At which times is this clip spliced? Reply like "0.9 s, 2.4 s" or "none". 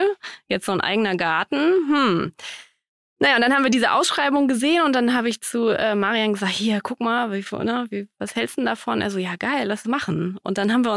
none